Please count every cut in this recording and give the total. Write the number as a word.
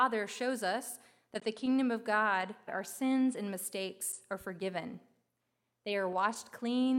one